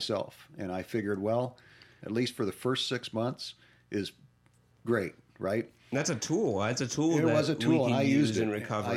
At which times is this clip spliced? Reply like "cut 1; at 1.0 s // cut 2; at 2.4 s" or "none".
cut 1; at 2.0 s